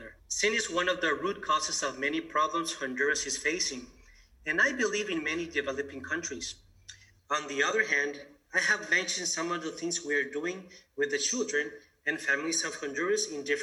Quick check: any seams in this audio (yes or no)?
yes